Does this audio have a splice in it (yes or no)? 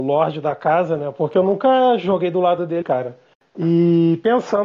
yes